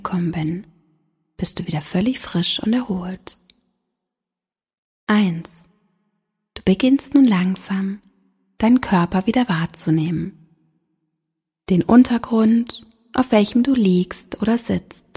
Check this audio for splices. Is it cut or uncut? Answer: uncut